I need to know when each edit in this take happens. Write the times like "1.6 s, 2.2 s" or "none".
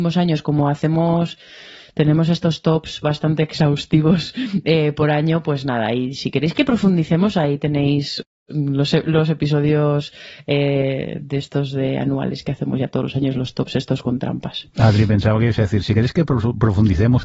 none